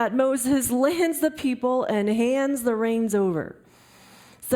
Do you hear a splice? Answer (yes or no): no